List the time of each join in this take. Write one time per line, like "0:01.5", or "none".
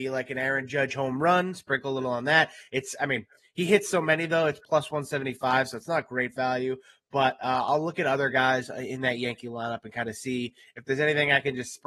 none